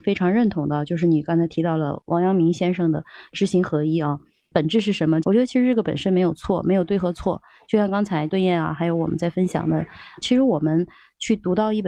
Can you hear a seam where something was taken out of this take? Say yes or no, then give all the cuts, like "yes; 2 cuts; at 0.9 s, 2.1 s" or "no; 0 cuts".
yes; 1 cut; at 5.2 s